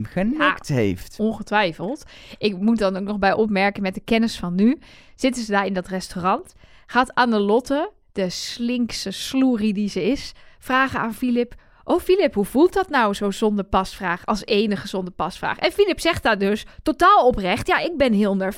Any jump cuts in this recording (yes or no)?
no